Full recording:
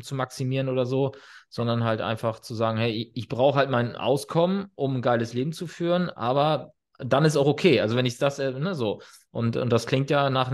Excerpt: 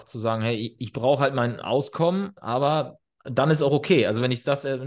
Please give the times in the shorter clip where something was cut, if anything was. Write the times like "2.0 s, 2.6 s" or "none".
2.4 s